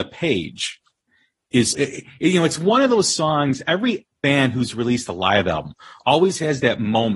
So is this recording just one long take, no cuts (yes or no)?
no